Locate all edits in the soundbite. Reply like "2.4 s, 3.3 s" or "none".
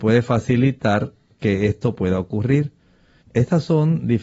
3.2 s